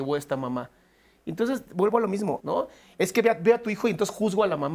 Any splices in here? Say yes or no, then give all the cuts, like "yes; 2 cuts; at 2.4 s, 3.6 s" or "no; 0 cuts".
yes; 1 cut; at 2.4 s